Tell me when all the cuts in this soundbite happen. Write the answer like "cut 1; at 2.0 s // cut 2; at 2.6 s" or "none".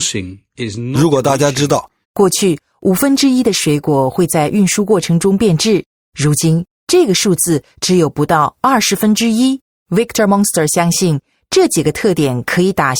cut 1; at 2.0 s // cut 2; at 9.8 s